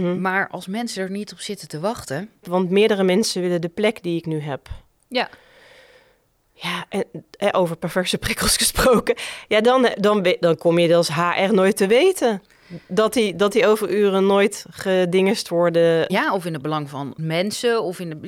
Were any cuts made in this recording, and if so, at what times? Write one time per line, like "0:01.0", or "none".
0:02.4
0:16.1
0:17.2